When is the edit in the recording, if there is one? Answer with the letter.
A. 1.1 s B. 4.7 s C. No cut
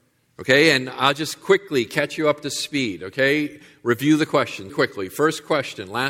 B